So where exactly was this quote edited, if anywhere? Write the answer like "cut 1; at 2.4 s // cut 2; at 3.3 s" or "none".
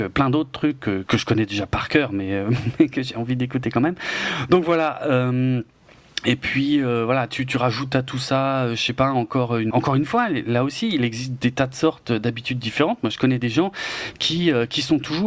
cut 1; at 1.1 s // cut 2; at 9.7 s